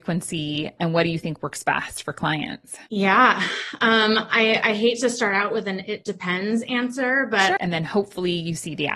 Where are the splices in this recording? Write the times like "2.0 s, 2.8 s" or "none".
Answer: 2.9 s, 7.6 s

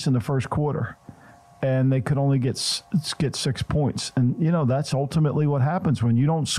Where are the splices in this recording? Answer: none

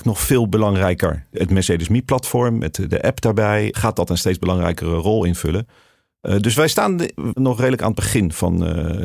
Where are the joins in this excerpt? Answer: 7.3 s

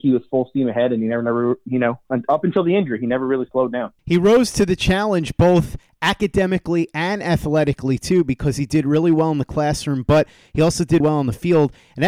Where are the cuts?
4.0 s, 11.0 s

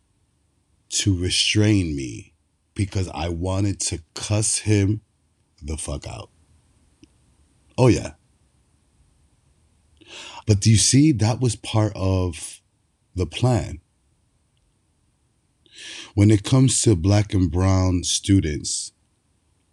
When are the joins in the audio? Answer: 10.4 s

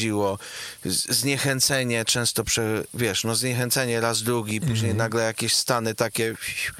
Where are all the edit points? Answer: none

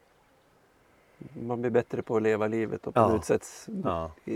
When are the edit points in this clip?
none

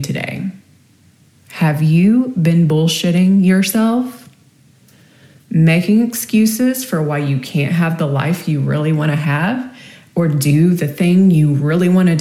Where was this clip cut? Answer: none

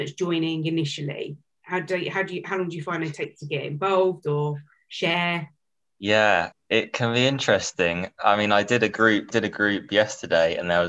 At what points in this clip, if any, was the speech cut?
6.5 s, 9.3 s

